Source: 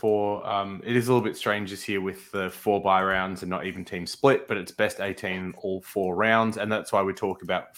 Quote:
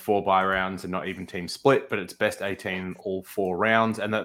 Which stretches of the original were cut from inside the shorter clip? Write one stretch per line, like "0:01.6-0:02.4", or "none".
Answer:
none